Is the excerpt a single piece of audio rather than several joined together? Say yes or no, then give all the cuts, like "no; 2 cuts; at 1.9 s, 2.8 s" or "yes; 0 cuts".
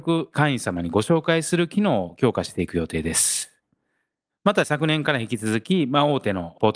no; 1 cut; at 4.3 s